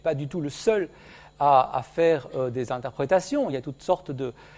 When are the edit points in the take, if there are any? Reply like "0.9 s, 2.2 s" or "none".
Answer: none